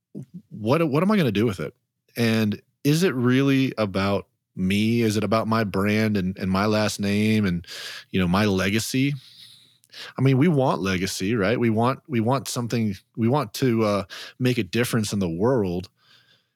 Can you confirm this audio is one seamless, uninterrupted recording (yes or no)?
yes